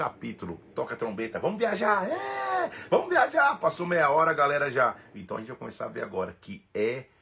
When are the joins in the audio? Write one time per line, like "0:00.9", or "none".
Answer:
0:02.9
0:05.1